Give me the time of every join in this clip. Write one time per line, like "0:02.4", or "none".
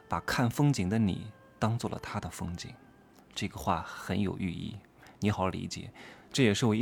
0:05.3